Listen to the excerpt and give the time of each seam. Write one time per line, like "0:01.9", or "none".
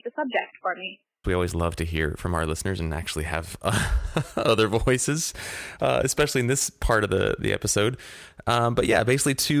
0:01.2